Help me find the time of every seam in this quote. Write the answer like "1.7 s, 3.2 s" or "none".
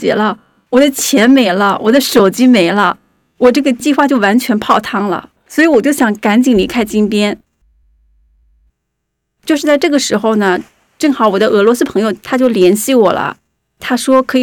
none